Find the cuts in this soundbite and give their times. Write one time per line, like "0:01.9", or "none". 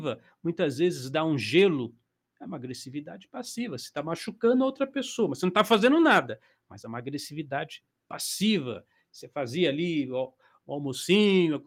none